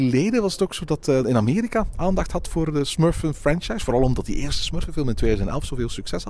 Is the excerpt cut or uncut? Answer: cut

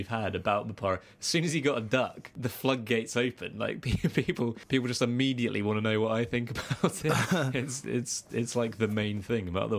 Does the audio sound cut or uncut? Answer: uncut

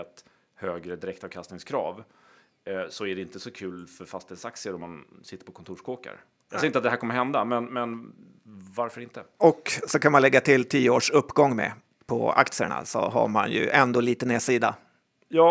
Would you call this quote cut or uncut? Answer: uncut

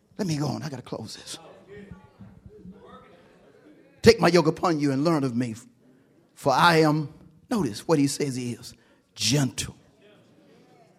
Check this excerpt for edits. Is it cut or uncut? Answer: uncut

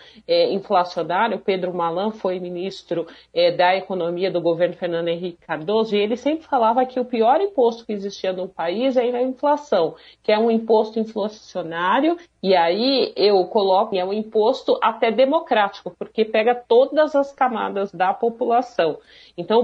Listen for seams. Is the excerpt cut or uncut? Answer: cut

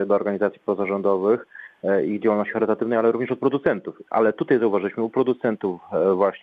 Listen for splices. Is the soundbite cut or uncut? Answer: uncut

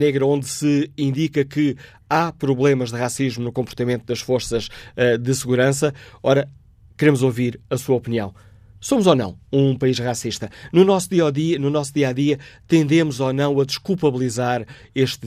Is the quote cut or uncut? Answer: uncut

